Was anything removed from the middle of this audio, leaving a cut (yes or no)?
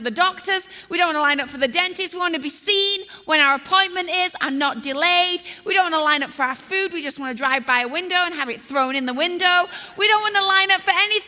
no